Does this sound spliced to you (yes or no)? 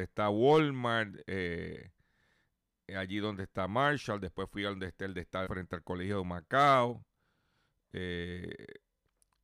yes